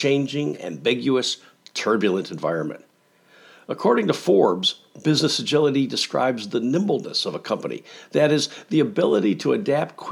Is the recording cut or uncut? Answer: uncut